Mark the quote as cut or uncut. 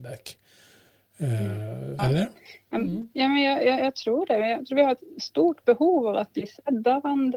cut